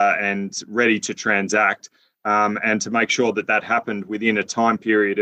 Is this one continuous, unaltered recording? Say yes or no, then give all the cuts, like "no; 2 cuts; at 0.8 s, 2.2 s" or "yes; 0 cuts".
yes; 0 cuts